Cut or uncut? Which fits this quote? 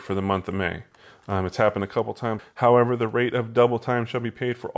cut